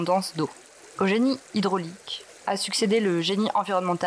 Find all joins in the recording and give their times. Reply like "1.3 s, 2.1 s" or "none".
0.9 s